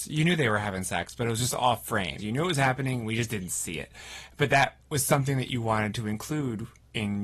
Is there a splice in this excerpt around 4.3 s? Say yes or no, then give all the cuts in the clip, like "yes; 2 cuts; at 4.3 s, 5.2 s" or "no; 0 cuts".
no; 1 cut; at 2.2 s